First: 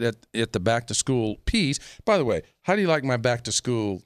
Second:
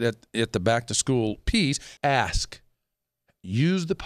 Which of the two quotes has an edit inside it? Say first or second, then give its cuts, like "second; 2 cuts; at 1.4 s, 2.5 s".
second; 1 cut; at 2.0 s